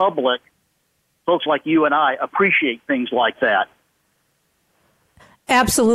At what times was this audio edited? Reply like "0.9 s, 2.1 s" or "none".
none